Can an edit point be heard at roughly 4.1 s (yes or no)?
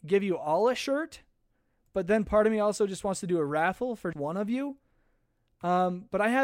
yes